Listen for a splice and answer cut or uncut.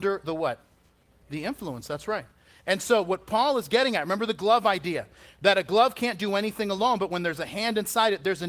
uncut